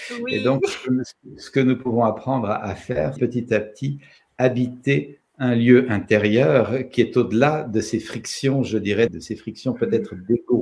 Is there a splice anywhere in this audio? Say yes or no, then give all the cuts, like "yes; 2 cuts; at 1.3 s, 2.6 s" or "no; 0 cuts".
yes; 2 cuts; at 3.2 s, 9.1 s